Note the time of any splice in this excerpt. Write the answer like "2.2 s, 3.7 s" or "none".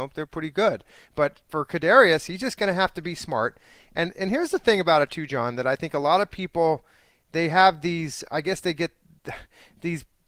8.3 s

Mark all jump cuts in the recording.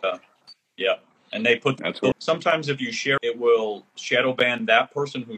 2.1 s, 3.2 s

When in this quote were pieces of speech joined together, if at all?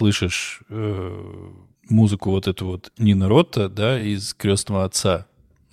none

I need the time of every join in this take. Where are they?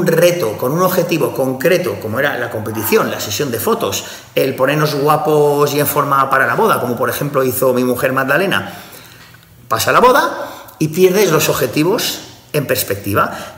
none

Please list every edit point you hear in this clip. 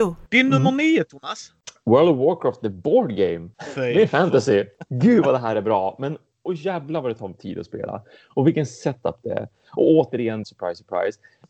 10.4 s

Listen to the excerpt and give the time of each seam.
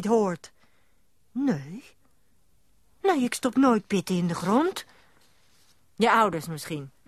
none

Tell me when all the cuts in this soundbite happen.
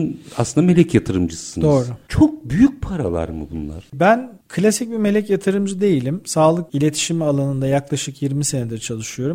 none

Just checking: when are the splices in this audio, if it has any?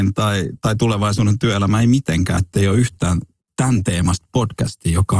2.4 s

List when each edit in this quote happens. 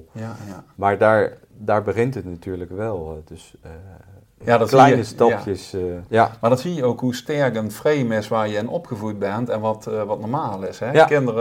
4.4 s, 6.1 s

